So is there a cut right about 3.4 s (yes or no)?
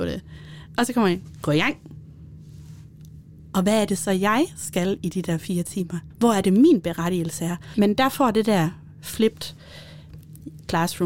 no